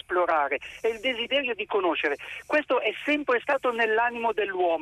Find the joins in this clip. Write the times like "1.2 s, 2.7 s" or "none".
none